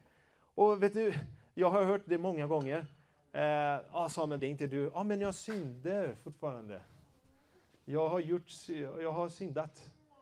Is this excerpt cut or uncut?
cut